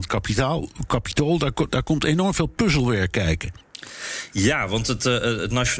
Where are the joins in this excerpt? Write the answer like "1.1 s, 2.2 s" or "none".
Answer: none